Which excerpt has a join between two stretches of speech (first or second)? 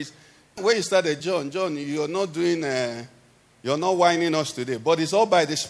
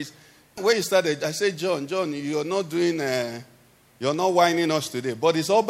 first